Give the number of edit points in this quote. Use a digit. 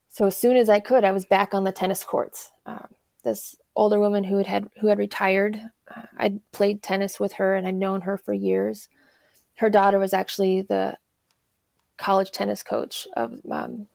0